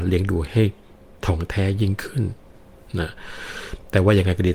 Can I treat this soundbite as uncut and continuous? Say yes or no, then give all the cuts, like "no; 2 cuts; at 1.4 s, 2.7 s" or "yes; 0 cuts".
yes; 0 cuts